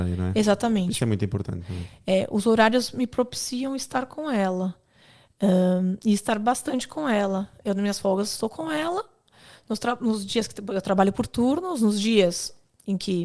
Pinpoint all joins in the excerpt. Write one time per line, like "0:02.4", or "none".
none